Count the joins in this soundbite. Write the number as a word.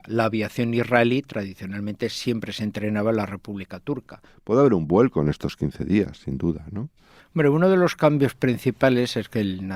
two